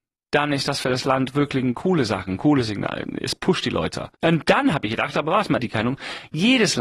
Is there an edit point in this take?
yes; 2 cuts; at 4.1 s, 5.6 s

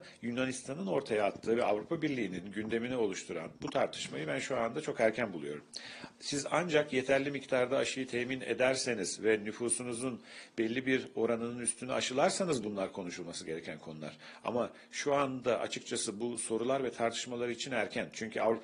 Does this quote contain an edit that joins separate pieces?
no; 0 cuts

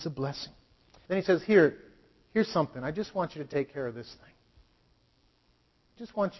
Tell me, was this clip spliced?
yes; 1 cut; at 1.0 s

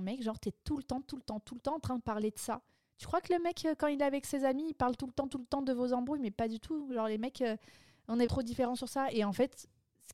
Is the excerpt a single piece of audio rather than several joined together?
no; 1 cut; at 8.3 s

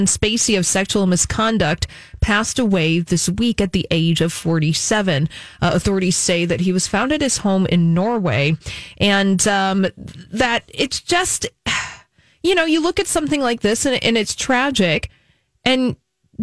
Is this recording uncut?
yes; 0 cuts

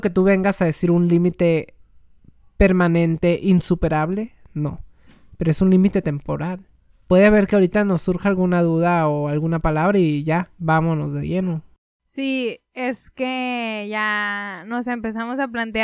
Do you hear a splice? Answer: no; 0 cuts

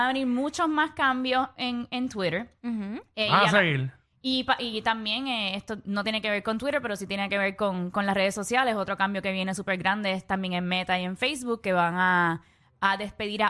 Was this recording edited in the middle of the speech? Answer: no; 0 cuts

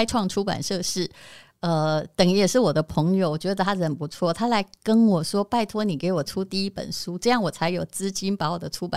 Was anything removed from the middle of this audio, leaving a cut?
no; 0 cuts

